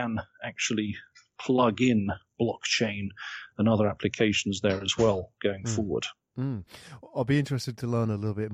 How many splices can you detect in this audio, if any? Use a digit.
0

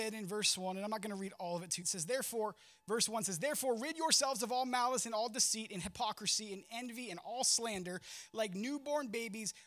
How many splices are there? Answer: 1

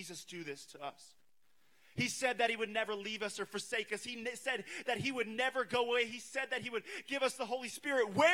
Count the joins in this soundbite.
0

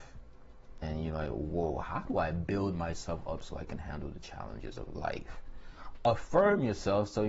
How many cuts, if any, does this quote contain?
0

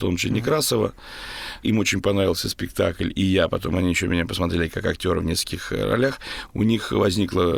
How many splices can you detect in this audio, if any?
0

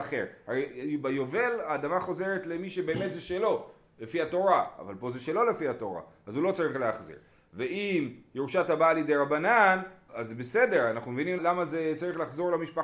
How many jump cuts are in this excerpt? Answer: 2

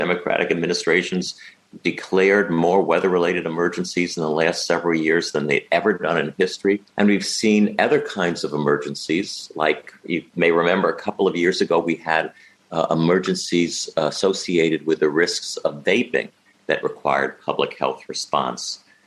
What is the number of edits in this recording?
1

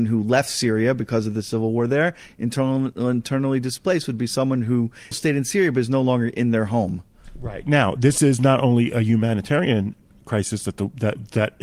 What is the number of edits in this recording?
1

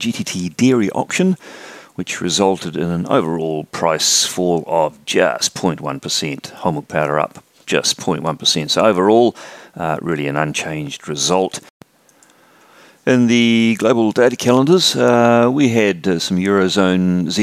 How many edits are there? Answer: 0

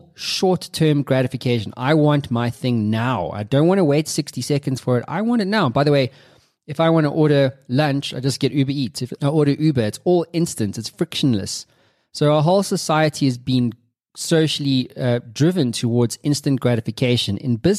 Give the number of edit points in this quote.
1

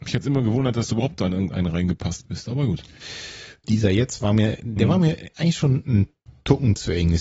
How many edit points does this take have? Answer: 1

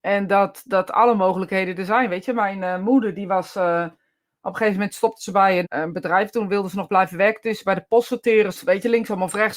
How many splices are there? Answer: 2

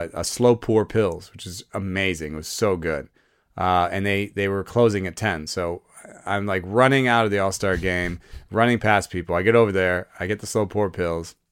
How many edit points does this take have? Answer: 0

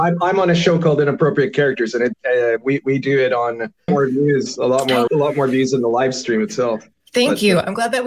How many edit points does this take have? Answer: 2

